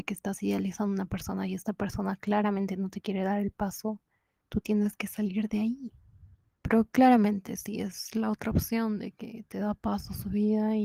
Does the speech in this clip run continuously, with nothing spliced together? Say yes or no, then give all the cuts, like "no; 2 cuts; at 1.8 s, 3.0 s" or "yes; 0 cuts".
no; 2 cuts; at 4.4 s, 6.6 s